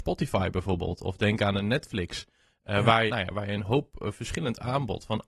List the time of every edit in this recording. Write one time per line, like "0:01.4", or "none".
0:03.1